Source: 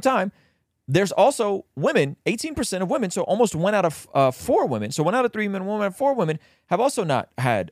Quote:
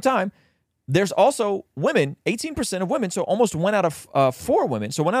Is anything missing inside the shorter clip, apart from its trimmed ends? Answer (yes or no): no